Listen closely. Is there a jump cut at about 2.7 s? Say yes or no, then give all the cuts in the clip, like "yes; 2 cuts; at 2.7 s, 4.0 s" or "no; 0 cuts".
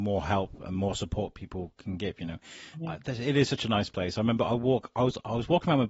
yes; 1 cut; at 2.7 s